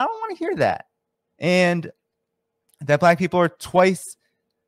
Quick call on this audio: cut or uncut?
cut